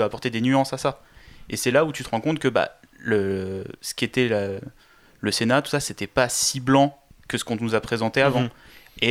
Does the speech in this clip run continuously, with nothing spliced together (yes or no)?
no